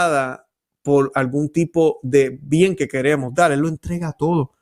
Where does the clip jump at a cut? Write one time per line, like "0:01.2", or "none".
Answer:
none